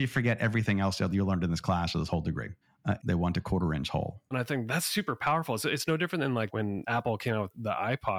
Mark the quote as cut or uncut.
cut